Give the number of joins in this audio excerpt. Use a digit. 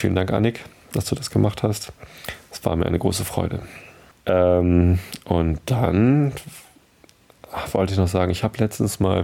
1